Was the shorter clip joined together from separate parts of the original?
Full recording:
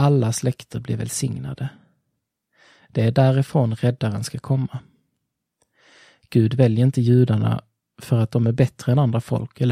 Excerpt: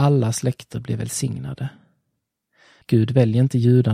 yes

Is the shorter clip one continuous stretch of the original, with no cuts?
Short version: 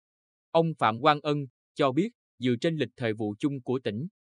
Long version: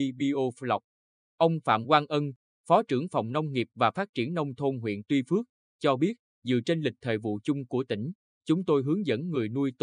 no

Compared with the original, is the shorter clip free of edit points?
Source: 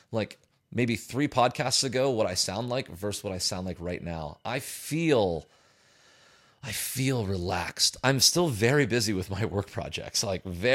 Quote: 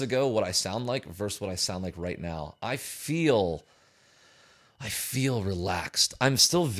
yes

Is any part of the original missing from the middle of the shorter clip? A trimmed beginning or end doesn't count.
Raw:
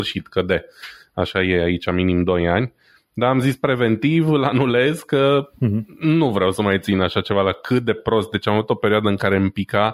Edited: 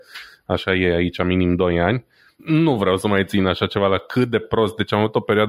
yes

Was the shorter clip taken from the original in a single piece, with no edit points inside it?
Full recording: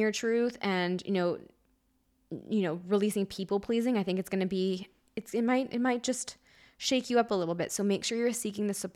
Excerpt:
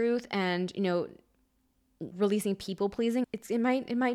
no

